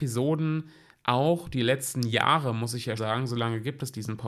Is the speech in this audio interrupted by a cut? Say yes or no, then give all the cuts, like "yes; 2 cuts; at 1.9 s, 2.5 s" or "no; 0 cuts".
yes; 1 cut; at 3.0 s